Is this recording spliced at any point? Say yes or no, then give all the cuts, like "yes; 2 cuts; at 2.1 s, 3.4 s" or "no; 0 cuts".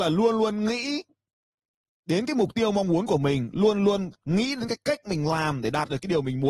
no; 0 cuts